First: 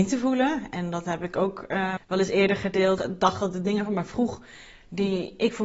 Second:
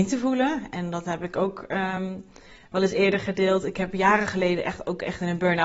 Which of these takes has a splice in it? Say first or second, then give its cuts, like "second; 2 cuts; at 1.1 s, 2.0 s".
first; 2 cuts; at 2.0 s, 3.0 s